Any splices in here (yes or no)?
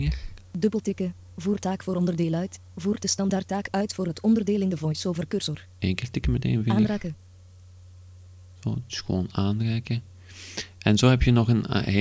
no